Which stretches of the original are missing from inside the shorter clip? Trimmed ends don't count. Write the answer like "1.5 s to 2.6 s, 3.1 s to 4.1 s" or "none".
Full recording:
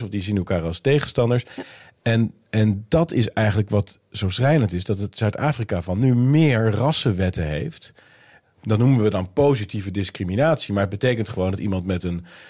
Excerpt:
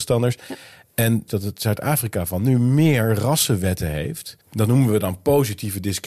2.4 s to 4.8 s, 8.0 s to 8.5 s